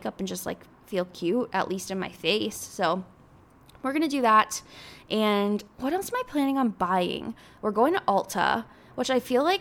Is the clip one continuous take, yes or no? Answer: yes